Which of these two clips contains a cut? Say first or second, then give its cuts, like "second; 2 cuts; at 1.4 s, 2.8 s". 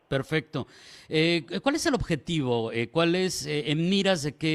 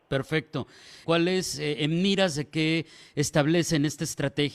second; 1 cut; at 1.0 s